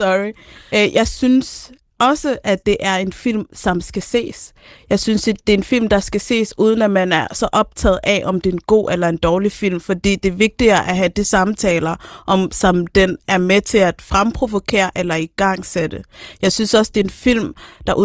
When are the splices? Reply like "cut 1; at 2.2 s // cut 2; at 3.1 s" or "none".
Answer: none